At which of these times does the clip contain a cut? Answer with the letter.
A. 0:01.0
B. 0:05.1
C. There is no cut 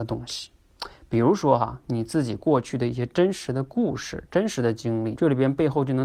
B